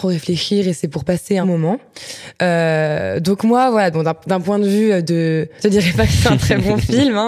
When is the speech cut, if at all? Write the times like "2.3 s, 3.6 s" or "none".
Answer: 1.4 s, 5.6 s